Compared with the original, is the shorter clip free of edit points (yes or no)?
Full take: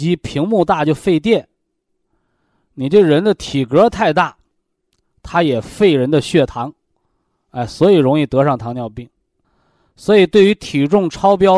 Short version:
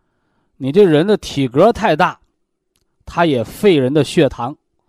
yes